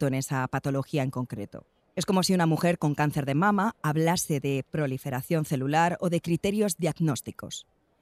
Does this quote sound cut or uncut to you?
uncut